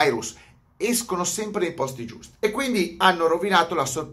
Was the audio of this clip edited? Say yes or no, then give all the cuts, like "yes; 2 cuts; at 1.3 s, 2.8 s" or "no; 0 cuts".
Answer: no; 0 cuts